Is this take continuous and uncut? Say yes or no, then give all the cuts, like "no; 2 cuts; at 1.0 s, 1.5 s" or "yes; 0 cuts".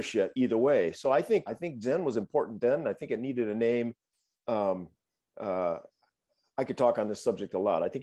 no; 1 cut; at 1.5 s